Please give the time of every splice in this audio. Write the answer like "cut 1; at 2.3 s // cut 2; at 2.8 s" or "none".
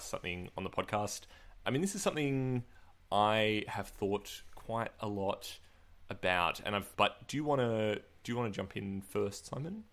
cut 1; at 6.9 s